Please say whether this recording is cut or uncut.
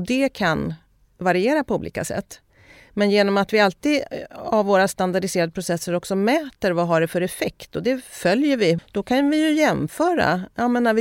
cut